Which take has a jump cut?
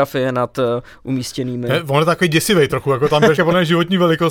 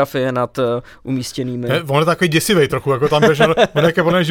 first; 1 cut; at 3.4 s

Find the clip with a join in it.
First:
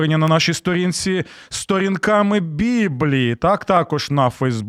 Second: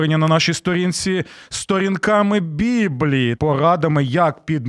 second; 1 cut; at 3.4 s

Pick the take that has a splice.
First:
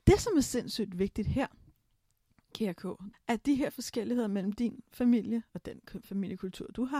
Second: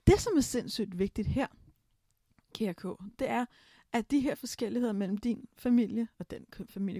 first; 1 cut; at 3.1 s

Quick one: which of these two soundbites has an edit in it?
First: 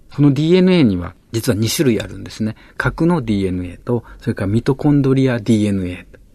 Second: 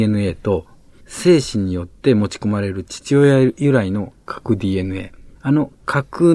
second; 1 cut; at 5.4 s

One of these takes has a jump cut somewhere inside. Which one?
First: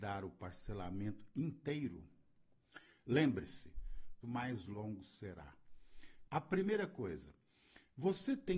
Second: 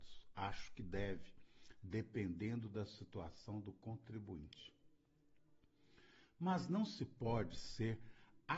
first; 2 cuts; at 4.2 s, 6.2 s

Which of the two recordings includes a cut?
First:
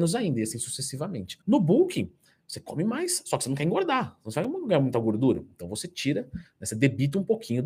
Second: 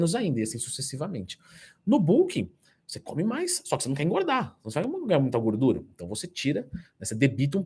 first; 1 cut; at 1.4 s

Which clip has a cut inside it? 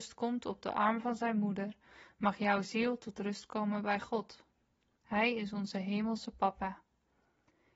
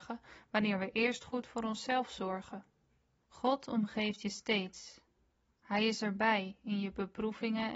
second; 1 cut; at 3.2 s

